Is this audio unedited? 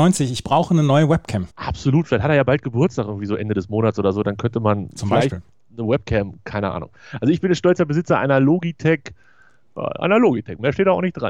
no; 1 cut; at 1.5 s

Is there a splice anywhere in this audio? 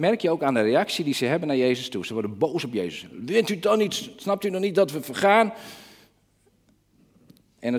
no; 0 cuts

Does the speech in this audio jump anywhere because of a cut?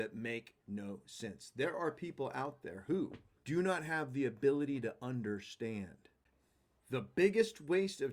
yes; 2 cuts; at 3.4 s, 6.3 s

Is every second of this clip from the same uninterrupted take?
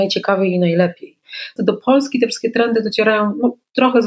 no; 1 cut; at 1.6 s

